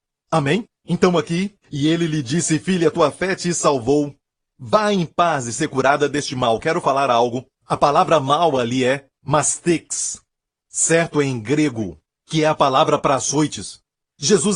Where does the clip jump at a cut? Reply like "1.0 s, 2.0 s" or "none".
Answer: none